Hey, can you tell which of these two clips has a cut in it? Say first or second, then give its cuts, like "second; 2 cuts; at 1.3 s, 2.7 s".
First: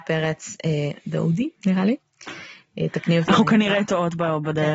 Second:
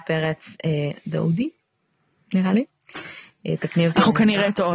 first; 1 cut; at 1.6 s